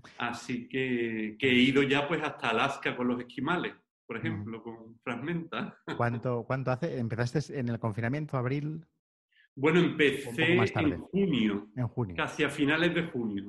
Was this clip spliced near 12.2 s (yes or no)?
no